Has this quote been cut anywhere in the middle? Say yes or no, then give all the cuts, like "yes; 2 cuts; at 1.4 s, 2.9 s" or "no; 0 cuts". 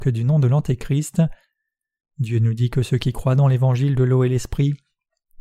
no; 0 cuts